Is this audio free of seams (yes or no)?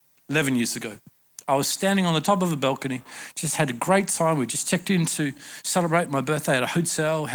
yes